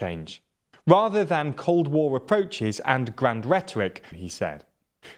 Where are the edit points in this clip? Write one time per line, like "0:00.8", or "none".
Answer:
0:04.1